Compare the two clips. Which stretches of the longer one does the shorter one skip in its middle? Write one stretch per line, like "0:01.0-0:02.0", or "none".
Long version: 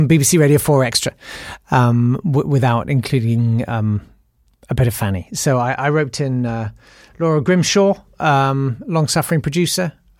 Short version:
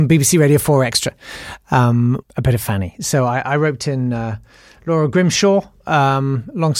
0:02.2-0:04.5